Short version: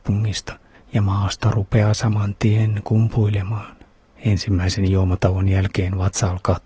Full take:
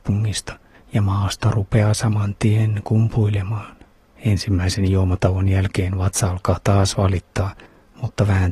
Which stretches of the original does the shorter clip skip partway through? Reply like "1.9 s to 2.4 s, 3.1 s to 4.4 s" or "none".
none